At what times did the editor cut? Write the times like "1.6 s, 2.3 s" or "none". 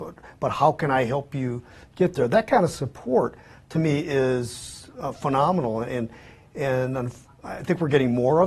none